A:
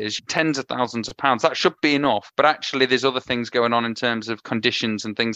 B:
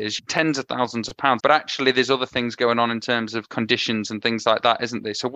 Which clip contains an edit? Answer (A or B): B